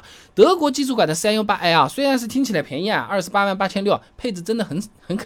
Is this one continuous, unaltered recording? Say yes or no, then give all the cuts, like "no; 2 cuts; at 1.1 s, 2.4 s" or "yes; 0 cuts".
yes; 0 cuts